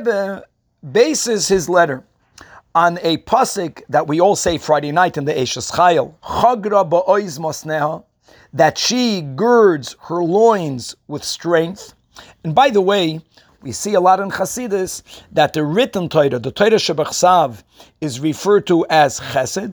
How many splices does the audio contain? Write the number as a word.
two